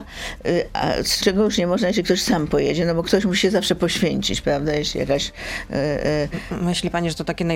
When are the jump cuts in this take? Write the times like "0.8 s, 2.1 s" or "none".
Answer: 1.2 s